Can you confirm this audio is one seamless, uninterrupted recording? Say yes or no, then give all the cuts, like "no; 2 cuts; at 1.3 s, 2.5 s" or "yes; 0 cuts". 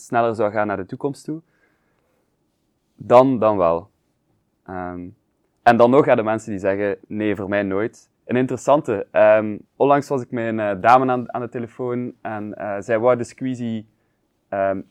no; 2 cuts; at 8.2 s, 9.7 s